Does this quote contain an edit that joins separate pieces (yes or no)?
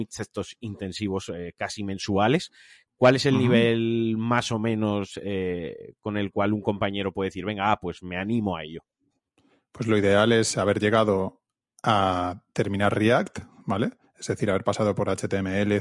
no